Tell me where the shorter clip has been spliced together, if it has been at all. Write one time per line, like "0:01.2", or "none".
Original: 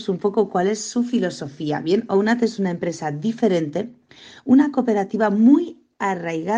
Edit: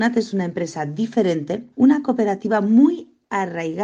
0:01.7